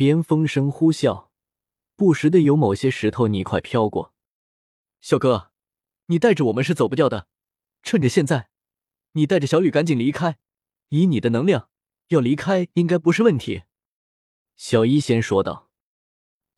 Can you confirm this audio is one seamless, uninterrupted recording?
yes; 0 cuts

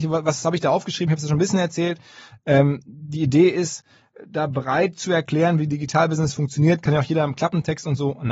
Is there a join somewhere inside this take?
no; 0 cuts

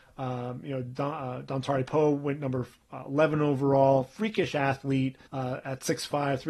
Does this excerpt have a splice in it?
yes; 1 cut; at 5.3 s

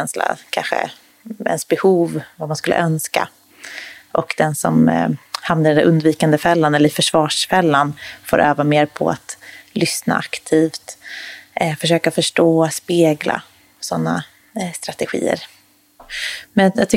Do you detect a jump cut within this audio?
yes; 1 cut; at 16.0 s

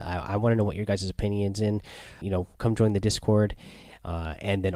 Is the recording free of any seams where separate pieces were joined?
no; 1 cut; at 2.2 s

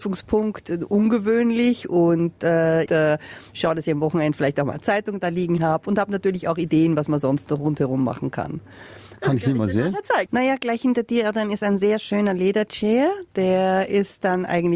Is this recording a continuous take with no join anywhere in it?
no; 3 cuts; at 2.9 s, 9.2 s, 10.3 s

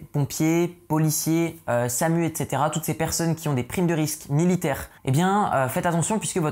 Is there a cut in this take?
yes; 1 cut; at 5.0 s

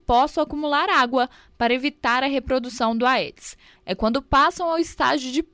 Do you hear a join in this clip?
yes; 1 cut; at 3.8 s

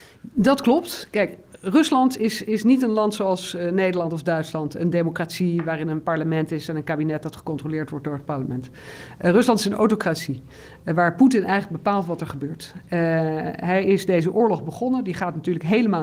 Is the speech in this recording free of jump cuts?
yes; 0 cuts

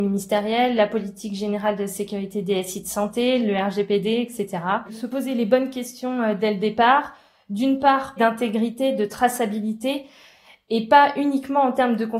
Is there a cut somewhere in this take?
yes; 3 cuts; at 3.4 s, 4.9 s, 8.2 s

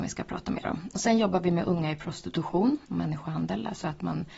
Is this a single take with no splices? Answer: no; 1 cut; at 2.8 s

